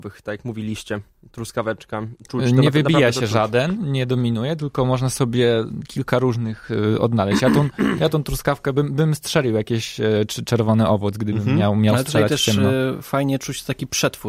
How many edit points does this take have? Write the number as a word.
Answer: zero